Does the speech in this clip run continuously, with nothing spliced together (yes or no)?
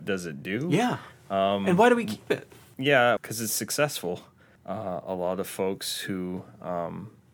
no